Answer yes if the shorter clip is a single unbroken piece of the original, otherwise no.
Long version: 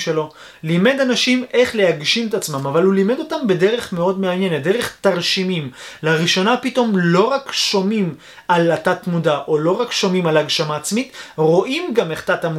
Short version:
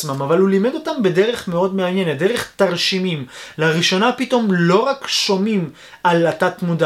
yes